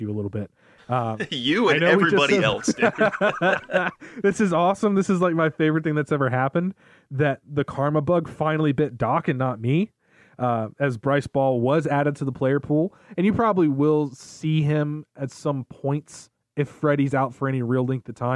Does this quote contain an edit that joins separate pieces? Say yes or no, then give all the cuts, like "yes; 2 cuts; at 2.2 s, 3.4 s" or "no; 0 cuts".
no; 0 cuts